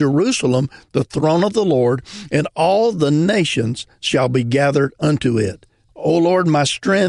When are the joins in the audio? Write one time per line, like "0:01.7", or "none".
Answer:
0:05.9

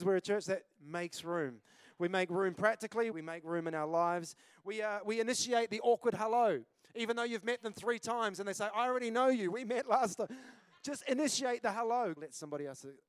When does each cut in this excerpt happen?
0:03.1
0:12.2

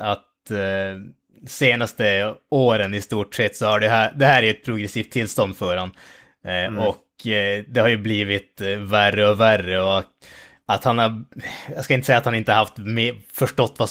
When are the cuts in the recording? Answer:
none

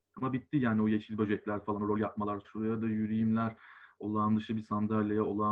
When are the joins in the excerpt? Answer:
0:02.4

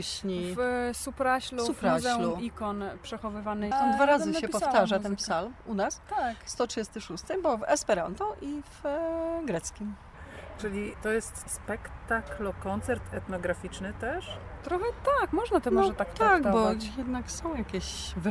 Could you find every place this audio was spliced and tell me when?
0:03.7

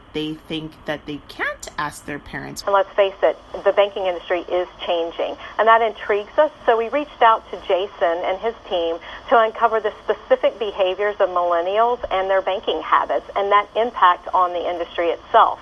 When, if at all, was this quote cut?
0:02.6

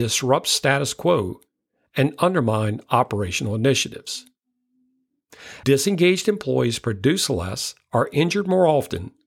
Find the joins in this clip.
0:05.6

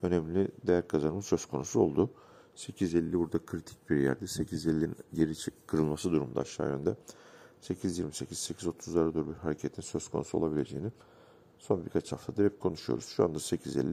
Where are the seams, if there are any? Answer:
none

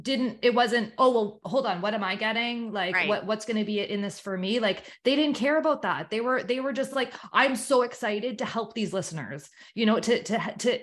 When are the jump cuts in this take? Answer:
none

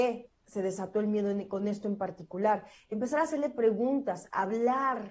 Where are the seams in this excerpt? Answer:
none

